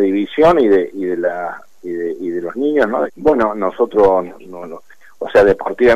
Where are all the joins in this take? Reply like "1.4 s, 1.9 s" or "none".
3.1 s